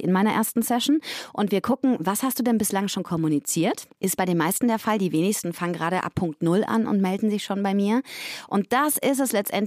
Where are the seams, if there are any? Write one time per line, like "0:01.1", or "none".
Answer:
0:03.9
0:08.5